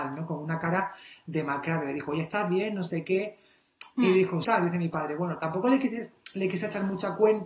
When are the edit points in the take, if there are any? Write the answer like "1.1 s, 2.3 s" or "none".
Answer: 4.4 s